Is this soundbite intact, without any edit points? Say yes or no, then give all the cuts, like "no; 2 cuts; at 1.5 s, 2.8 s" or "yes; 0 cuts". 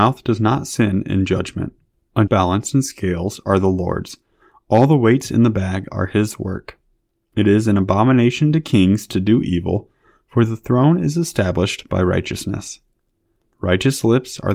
no; 1 cut; at 2.3 s